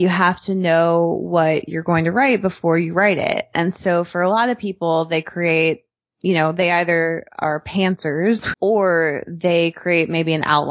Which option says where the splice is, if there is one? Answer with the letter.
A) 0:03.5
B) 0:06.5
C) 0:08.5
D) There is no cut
C